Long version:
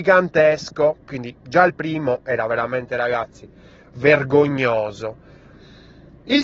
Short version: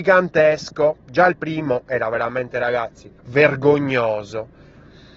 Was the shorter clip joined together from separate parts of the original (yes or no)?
yes